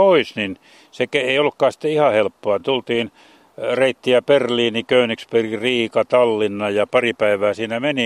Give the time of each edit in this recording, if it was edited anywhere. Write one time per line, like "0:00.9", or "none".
none